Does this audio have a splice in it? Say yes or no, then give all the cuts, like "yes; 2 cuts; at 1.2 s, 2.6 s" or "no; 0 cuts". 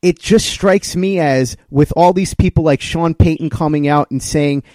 no; 0 cuts